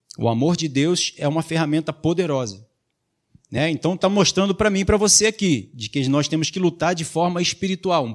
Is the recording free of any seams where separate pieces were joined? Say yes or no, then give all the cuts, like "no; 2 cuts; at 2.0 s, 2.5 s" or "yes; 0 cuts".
yes; 0 cuts